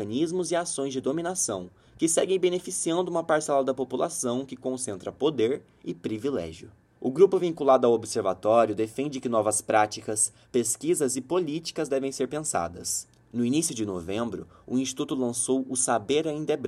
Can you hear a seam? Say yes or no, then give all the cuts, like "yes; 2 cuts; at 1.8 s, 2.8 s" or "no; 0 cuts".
yes; 1 cut; at 7.0 s